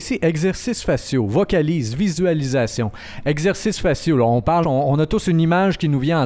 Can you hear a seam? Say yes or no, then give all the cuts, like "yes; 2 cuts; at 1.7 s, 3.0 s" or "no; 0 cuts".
yes; 1 cut; at 4.6 s